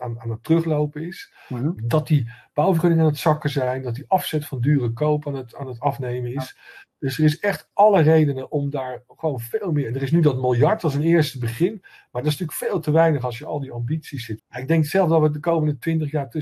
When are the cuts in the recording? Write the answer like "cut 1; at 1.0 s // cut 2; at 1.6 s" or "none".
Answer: cut 1; at 1.8 s // cut 2; at 14.4 s

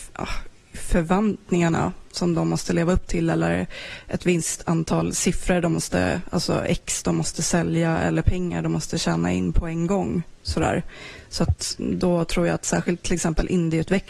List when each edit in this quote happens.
none

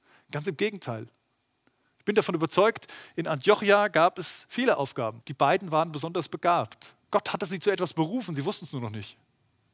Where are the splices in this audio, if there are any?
cut 1; at 5.2 s // cut 2; at 7.0 s

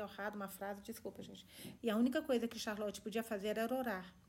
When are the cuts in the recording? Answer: cut 1; at 1.8 s

